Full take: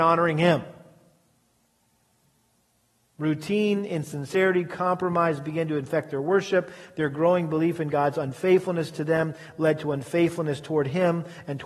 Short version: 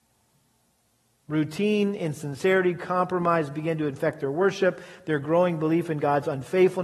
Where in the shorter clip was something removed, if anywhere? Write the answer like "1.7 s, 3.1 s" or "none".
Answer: none